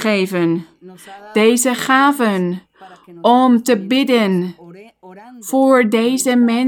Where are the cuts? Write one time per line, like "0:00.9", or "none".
none